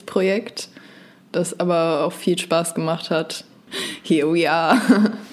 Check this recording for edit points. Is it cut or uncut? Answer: cut